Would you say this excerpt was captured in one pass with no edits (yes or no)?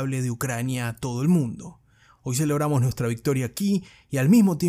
yes